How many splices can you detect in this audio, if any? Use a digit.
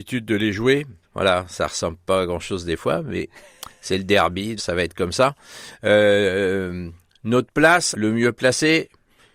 3